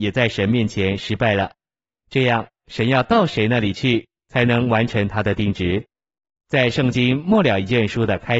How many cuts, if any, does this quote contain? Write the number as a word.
zero